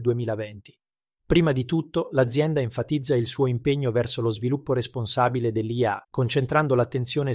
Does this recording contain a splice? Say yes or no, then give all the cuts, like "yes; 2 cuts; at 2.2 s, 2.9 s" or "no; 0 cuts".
yes; 2 cuts; at 1.2 s, 6.0 s